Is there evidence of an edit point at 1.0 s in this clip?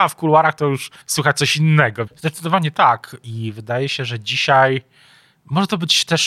yes; 2 cuts; at 1.0 s, 2.1 s

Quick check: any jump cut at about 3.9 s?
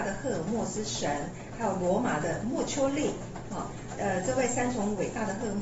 yes; 1 cut; at 3.9 s

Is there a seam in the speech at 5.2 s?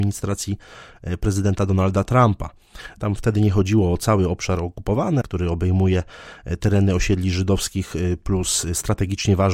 yes; 1 cut; at 5.2 s

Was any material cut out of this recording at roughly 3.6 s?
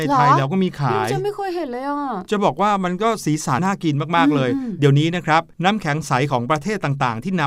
yes; 1 cut; at 3.6 s

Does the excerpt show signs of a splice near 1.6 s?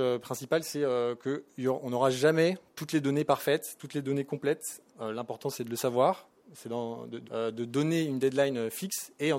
no; 2 cuts; at 4.9 s, 7.2 s

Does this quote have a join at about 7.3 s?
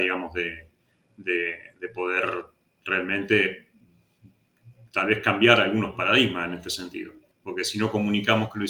yes; 1 cut; at 7.3 s

